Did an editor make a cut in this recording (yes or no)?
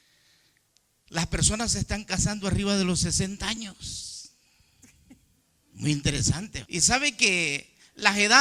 yes